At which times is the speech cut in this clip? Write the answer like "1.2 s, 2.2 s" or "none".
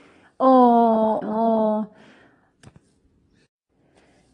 1.2 s